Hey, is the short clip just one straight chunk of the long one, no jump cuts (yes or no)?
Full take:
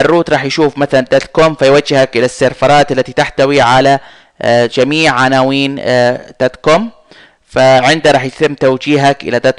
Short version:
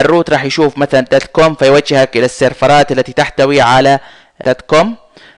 no